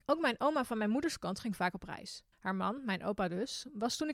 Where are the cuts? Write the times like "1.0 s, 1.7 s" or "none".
2.3 s